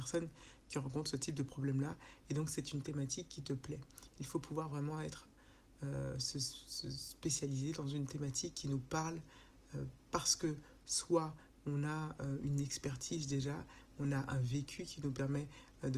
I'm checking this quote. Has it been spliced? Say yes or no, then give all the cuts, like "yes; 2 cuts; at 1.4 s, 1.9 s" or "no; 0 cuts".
no; 0 cuts